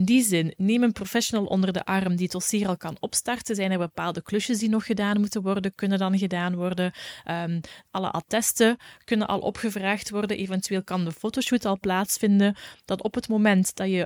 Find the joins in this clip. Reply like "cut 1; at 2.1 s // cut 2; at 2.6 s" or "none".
none